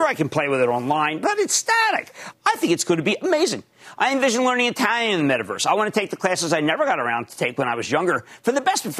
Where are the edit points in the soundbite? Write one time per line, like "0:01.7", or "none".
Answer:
0:02.3